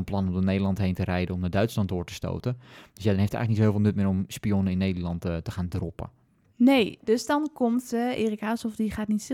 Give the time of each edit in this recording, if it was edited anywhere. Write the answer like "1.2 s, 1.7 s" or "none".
none